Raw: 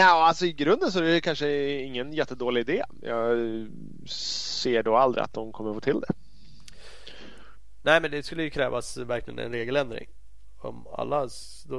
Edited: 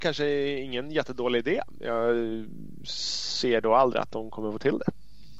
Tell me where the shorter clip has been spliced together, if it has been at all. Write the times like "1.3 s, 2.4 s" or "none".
none